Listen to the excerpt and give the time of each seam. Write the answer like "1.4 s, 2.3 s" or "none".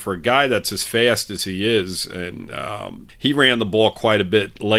3.1 s